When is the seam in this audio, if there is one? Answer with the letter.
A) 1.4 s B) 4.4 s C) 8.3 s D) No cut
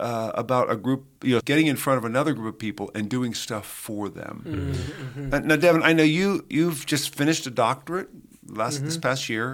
A